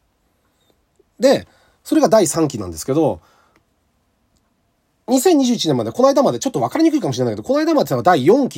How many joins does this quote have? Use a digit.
0